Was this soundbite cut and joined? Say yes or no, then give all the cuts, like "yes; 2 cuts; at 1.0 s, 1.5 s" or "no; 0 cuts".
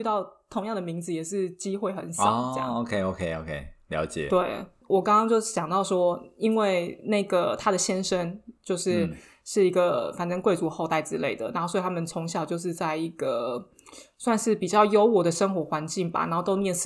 no; 0 cuts